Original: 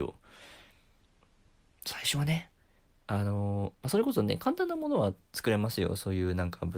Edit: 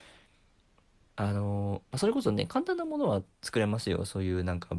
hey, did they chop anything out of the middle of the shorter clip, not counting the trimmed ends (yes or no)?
yes